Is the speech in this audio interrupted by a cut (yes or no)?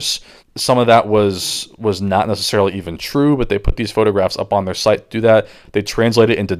no